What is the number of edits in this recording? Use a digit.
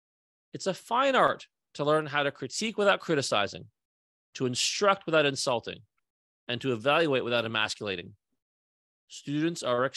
1